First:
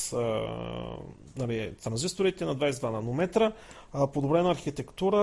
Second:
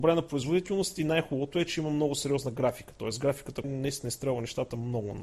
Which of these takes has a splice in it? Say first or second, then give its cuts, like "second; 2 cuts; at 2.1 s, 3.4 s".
second; 1 cut; at 3.6 s